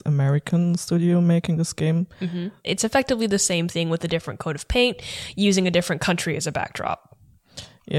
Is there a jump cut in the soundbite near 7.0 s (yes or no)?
no